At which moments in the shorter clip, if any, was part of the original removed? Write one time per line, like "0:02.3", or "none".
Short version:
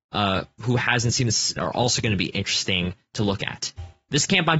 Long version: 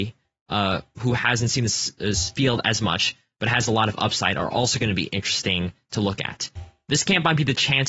0:01.6